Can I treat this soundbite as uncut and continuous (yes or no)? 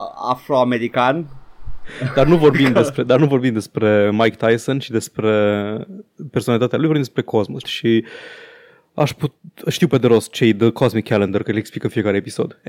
no